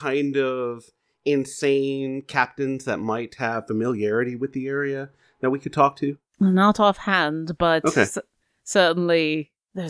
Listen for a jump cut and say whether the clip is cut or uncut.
cut